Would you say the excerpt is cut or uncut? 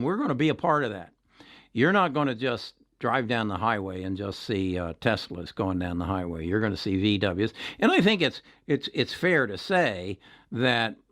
uncut